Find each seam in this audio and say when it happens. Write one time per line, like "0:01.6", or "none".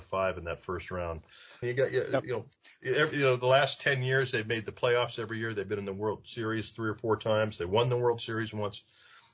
0:01.6